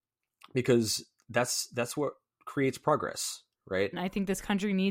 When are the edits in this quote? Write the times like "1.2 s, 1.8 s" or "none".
3.9 s